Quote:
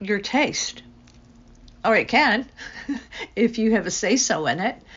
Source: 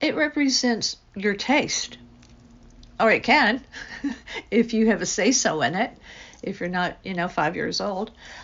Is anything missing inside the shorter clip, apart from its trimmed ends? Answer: no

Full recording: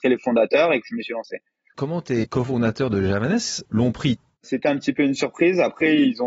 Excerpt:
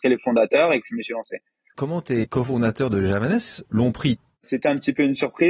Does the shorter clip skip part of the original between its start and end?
no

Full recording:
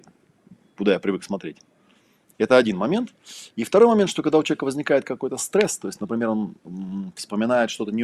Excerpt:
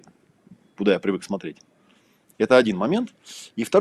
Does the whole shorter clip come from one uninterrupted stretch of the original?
yes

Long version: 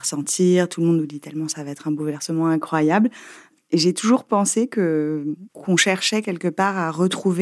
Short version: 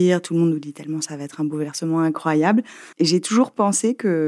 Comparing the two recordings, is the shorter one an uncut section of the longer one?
no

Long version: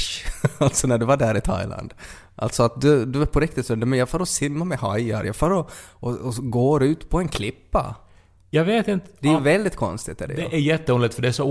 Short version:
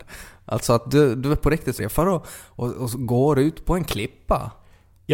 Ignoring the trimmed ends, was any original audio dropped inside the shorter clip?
yes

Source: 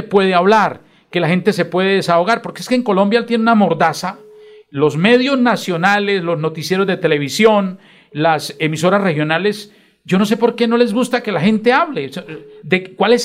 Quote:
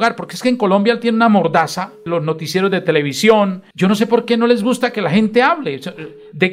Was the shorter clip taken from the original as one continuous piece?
no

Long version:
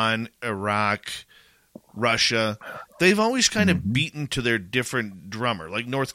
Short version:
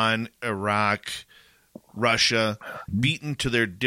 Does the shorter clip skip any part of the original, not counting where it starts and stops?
yes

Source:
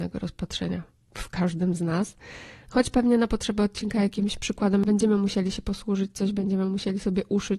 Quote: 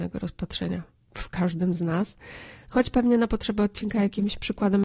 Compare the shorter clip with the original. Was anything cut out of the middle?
no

